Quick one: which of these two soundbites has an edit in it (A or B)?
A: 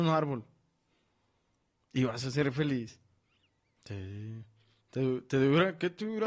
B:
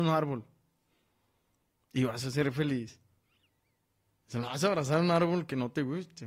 A